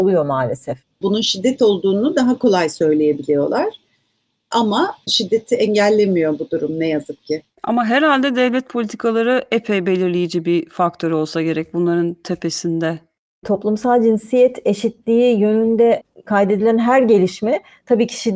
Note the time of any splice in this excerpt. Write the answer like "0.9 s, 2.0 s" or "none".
1.0 s